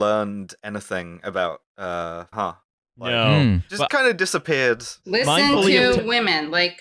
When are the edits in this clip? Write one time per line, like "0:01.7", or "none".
0:02.3
0:03.9